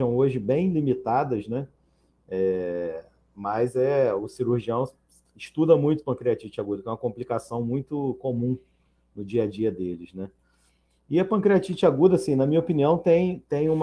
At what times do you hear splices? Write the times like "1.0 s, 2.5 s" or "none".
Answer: none